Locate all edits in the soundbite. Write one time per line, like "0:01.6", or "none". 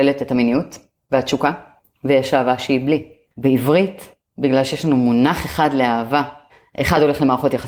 0:03.3